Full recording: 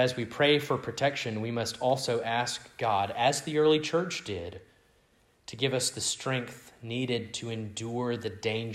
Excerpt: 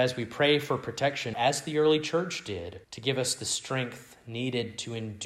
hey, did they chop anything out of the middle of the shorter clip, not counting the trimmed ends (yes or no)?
yes